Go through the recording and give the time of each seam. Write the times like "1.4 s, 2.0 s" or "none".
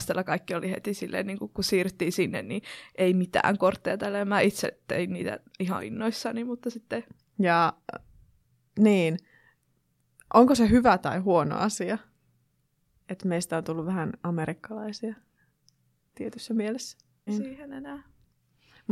7.2 s, 17.3 s

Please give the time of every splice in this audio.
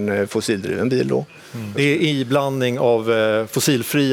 1.7 s

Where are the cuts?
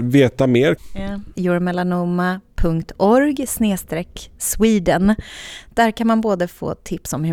1.3 s

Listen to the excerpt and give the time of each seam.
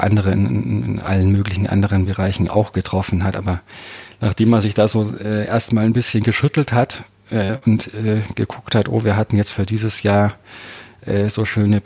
none

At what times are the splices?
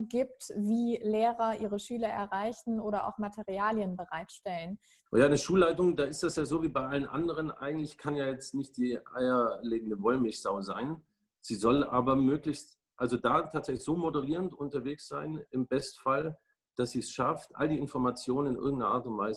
5.1 s

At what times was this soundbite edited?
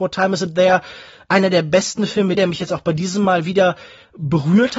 2.3 s

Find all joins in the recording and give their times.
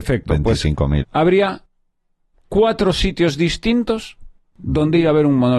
1.0 s

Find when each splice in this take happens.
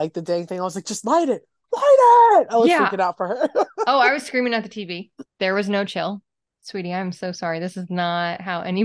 none

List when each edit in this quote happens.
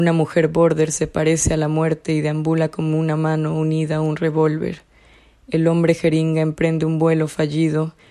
none

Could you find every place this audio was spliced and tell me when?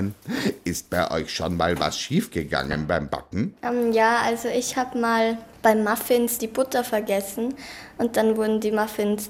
none

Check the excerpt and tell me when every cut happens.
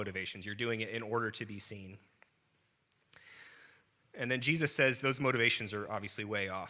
none

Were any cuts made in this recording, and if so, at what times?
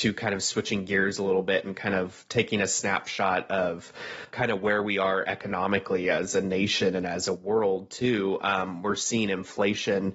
4.3 s

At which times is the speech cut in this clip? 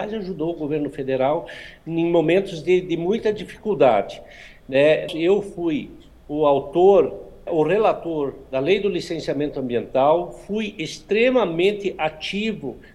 5.1 s, 7.5 s

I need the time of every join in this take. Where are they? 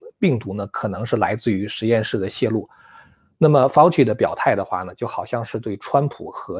none

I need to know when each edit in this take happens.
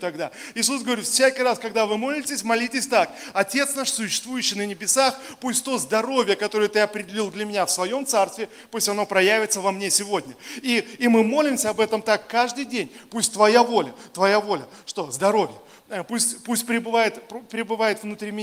none

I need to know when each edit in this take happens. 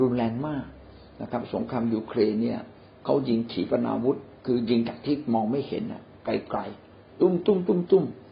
4.4 s

